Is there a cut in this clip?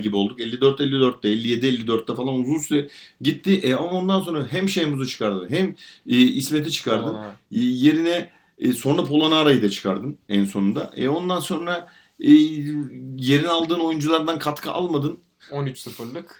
yes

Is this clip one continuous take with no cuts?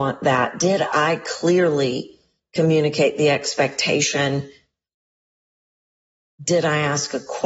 yes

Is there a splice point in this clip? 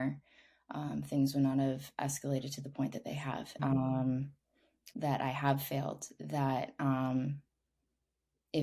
yes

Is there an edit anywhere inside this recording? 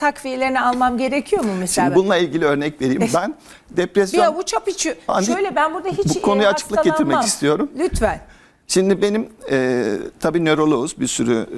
no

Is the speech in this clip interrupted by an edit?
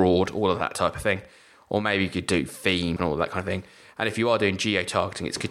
yes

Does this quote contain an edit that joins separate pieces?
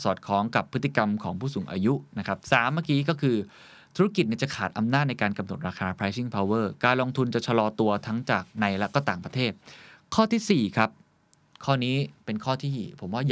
no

